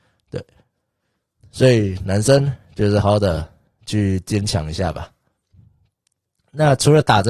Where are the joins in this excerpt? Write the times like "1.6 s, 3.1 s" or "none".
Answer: 3.0 s